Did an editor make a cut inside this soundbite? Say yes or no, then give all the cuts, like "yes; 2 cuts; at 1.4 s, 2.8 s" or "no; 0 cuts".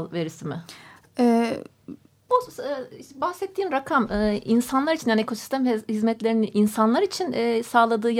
yes; 1 cut; at 2.3 s